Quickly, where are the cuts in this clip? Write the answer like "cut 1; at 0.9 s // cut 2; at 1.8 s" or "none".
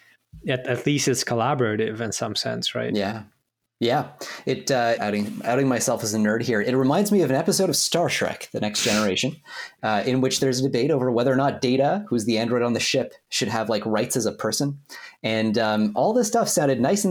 cut 1; at 5.0 s